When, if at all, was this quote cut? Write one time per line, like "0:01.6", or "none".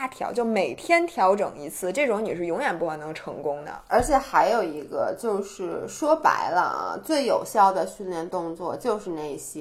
none